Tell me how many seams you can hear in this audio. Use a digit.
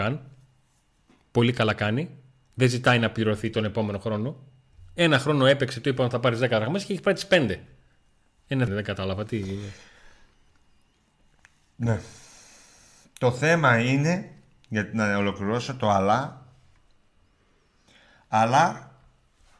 1